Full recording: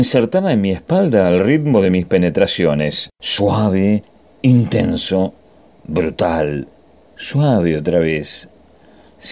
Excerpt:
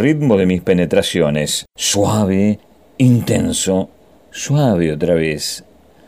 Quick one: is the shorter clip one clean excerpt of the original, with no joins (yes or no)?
no